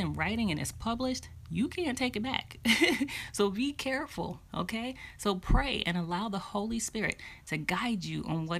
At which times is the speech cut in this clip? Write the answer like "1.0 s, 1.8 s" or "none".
none